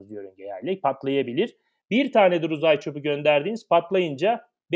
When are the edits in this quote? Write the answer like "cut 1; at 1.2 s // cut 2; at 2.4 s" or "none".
cut 1; at 1.8 s

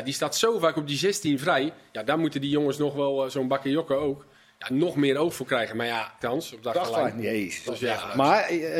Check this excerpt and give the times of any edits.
cut 1; at 6.2 s // cut 2; at 7.7 s

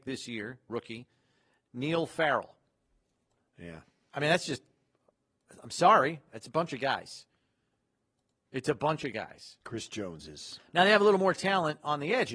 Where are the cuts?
cut 1; at 3.4 s // cut 2; at 9.6 s

